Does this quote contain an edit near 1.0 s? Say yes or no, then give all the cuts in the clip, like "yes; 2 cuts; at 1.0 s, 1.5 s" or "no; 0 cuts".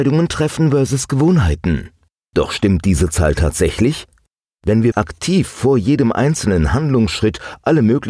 no; 2 cuts; at 2.3 s, 4.9 s